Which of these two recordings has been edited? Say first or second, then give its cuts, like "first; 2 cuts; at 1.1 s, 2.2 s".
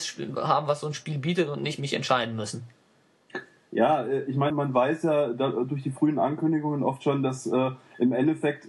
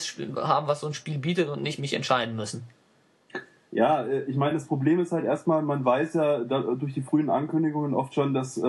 first; 1 cut; at 4.5 s